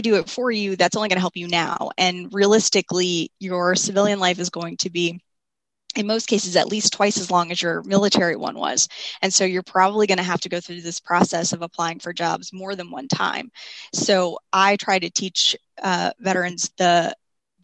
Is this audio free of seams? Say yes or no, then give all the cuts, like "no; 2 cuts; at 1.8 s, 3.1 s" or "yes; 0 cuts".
yes; 0 cuts